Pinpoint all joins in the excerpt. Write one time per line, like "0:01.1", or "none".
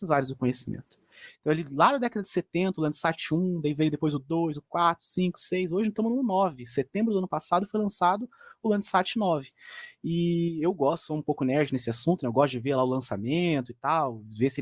0:04.5